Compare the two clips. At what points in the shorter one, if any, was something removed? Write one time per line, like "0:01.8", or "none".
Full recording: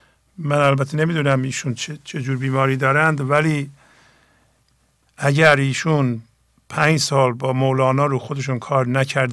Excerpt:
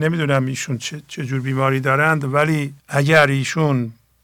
0:02.8